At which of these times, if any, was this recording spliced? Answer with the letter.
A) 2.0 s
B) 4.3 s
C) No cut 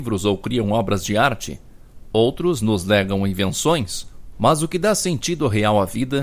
B